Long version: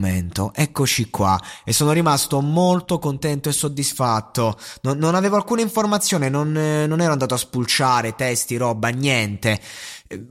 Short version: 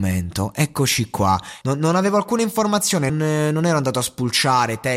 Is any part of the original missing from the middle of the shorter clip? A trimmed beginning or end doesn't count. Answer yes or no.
yes